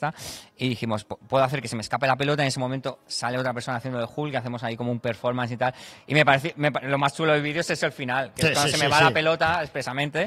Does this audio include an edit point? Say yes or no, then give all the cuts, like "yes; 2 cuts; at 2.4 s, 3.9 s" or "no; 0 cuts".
no; 0 cuts